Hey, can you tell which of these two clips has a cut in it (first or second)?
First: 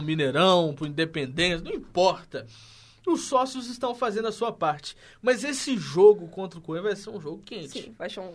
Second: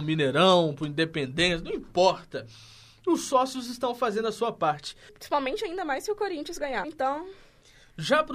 second